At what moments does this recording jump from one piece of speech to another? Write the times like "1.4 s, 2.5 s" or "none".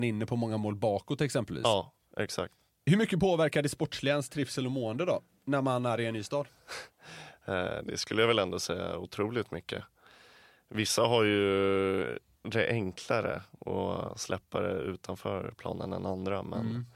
none